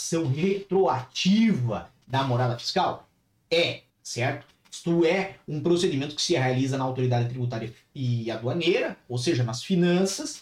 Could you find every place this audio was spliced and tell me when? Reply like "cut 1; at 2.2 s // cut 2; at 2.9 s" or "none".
cut 1; at 3.9 s